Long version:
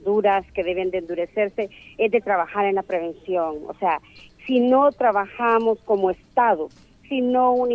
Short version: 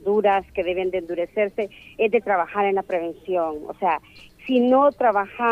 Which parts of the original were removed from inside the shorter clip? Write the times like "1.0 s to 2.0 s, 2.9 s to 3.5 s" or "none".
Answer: none